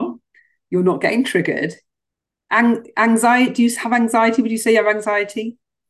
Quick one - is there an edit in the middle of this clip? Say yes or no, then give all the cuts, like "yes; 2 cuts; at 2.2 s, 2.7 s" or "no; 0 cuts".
no; 0 cuts